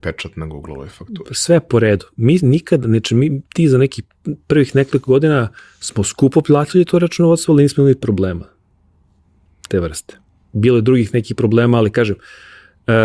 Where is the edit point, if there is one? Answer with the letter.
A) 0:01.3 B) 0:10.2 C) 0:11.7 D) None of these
D